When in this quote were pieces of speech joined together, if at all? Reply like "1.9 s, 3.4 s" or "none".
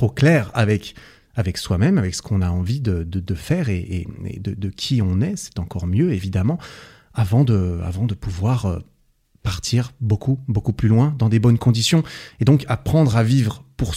none